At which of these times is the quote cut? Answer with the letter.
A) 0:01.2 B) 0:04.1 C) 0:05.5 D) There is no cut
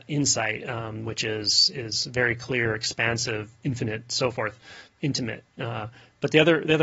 D